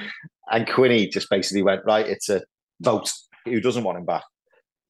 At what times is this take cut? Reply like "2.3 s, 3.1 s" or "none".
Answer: 3.4 s